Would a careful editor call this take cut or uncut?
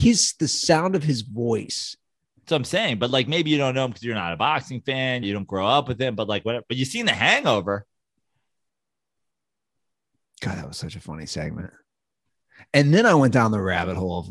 cut